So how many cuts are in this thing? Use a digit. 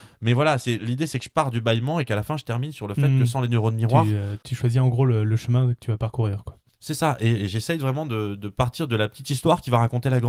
0